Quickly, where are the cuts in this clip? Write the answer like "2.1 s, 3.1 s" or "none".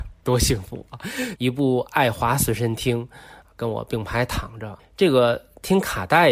1.4 s, 4.8 s